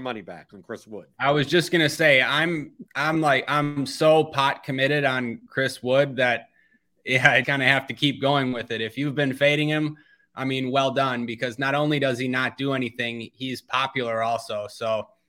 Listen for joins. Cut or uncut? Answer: cut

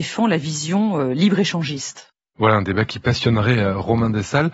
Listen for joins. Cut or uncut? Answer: uncut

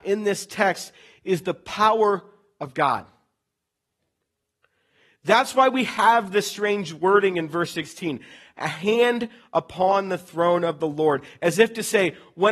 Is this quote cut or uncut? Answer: uncut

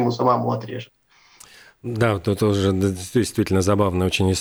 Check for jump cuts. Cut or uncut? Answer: uncut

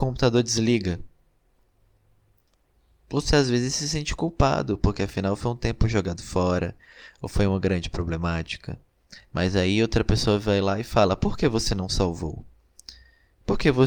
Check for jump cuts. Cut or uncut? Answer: uncut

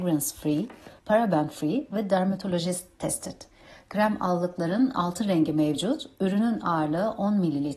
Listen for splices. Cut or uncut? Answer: cut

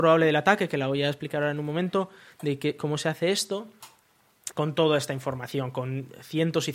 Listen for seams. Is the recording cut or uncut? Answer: cut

